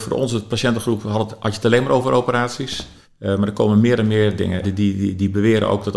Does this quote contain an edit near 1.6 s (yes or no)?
no